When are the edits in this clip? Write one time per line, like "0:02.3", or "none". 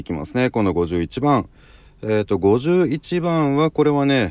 none